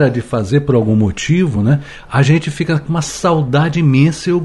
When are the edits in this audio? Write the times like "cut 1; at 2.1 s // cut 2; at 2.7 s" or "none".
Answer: none